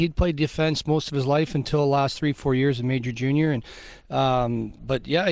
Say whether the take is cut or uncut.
uncut